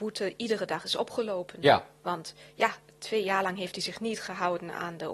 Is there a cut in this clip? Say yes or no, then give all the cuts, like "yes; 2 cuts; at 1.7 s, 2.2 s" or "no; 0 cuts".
no; 0 cuts